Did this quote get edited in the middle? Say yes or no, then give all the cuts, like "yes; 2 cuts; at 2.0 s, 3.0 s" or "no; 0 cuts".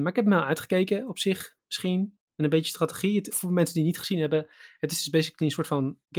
yes; 1 cut; at 3.3 s